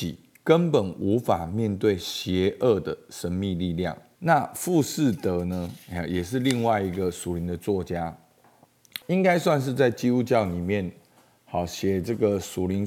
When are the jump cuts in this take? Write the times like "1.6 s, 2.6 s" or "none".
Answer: 4.2 s, 9.0 s